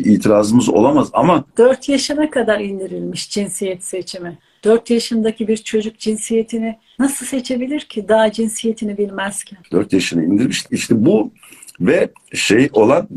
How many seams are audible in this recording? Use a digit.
1